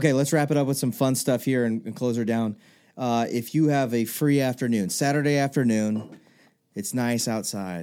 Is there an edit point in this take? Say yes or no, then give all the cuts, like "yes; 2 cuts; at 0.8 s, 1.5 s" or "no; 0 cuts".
no; 0 cuts